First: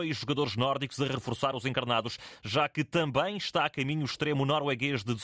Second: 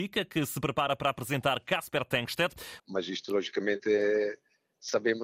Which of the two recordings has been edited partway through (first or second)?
second